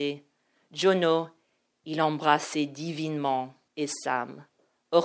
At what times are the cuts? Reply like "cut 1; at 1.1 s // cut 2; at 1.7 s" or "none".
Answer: cut 1; at 3.7 s